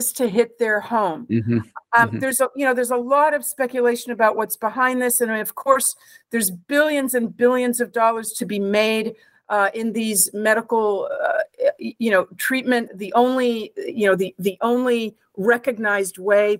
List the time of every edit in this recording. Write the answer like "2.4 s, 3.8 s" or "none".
12.9 s